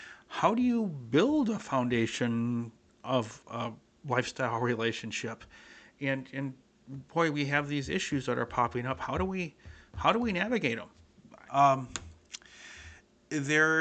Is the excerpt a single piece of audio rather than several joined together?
no; 1 cut; at 11.5 s

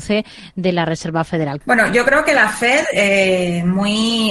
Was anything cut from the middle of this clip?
yes; 1 cut; at 1.6 s

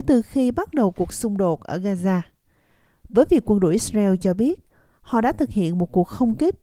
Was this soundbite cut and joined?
no; 0 cuts

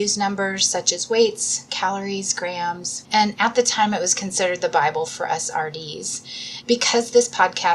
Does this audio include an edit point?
yes; 2 cuts; at 3.0 s, 6.6 s

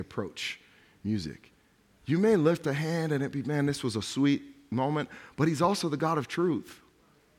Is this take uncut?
yes; 0 cuts

